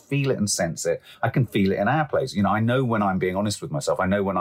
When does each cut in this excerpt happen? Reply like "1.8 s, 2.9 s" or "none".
none